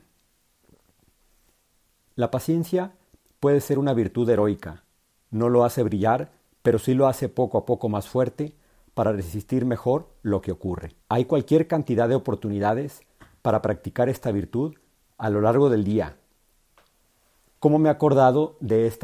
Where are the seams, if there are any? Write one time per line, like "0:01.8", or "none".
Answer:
0:05.2
0:11.0